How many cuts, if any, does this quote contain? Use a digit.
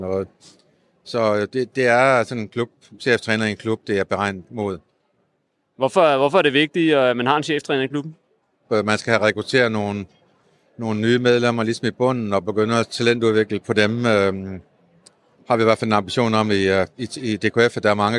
1